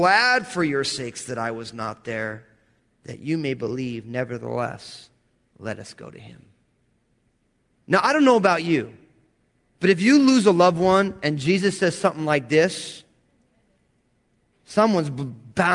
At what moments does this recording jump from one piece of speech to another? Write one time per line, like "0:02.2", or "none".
none